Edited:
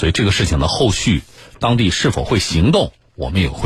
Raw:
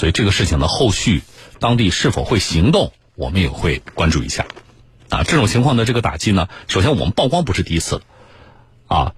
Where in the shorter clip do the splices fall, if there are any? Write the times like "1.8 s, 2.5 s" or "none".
none